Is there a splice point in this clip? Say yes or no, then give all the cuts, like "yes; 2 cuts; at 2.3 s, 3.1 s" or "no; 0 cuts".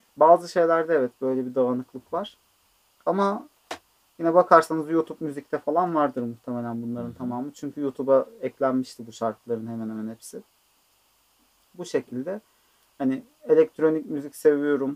no; 0 cuts